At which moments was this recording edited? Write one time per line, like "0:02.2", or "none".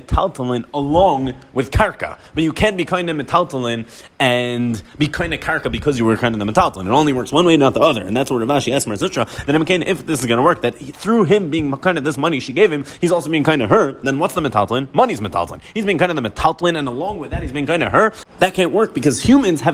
none